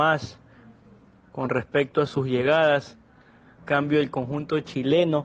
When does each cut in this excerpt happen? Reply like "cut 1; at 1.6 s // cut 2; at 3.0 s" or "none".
cut 1; at 3.6 s